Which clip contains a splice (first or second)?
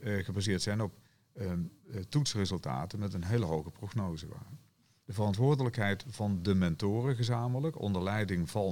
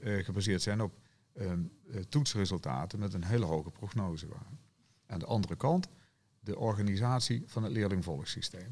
first